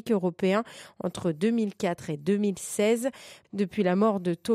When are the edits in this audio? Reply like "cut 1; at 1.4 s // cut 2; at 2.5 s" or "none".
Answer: cut 1; at 3.4 s